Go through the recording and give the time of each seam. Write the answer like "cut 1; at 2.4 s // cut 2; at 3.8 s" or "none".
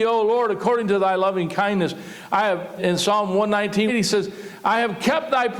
cut 1; at 2.8 s // cut 2; at 3.9 s